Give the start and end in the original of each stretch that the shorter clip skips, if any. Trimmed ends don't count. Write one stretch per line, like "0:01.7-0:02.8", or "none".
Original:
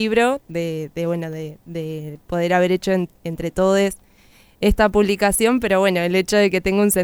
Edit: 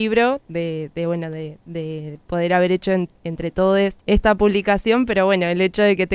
0:04.0-0:04.5